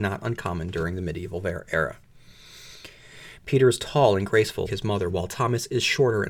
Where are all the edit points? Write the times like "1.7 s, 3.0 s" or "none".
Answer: 3.4 s, 4.6 s